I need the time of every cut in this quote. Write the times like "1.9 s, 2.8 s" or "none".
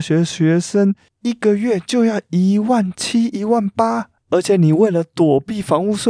none